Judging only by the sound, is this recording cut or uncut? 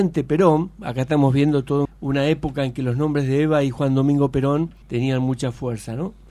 cut